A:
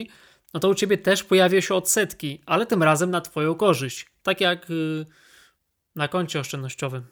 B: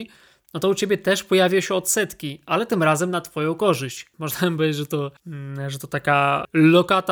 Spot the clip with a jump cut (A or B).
B